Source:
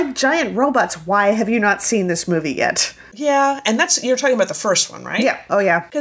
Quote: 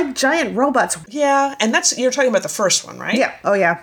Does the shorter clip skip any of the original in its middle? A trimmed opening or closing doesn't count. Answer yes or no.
yes